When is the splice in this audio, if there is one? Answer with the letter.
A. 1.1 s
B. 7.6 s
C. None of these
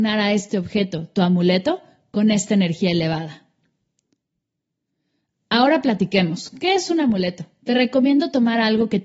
B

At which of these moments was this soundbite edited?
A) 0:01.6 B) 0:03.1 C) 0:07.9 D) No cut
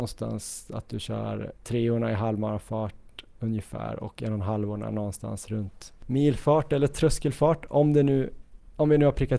A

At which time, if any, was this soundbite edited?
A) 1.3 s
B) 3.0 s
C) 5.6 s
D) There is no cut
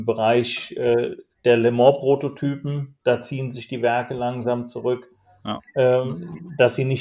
C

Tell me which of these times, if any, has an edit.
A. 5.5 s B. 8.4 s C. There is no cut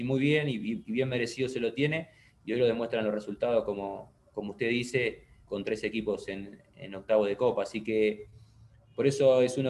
A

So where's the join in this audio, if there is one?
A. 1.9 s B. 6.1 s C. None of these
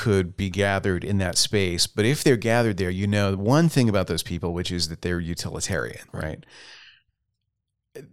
B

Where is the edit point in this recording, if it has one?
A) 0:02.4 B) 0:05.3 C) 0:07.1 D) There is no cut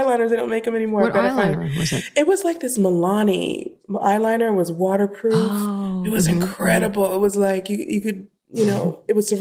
D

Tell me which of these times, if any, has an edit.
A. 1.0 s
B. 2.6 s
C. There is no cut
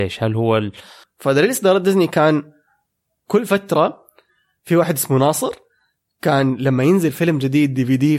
A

